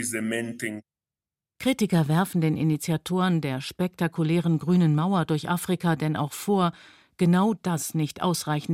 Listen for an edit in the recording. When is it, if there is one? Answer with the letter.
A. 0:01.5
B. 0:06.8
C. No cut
C